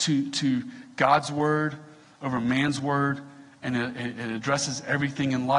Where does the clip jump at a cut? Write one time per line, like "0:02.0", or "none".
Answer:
none